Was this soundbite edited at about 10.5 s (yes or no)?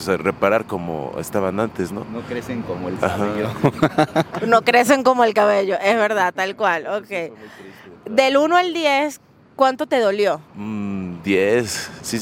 yes